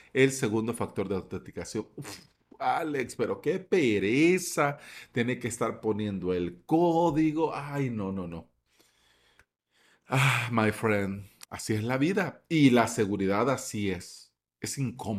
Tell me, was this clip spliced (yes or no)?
no